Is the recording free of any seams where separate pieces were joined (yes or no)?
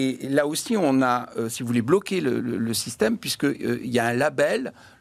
yes